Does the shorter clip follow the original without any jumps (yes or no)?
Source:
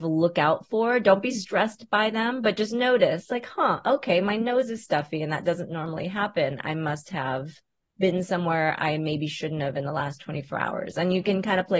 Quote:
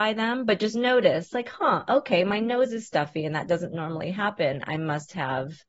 yes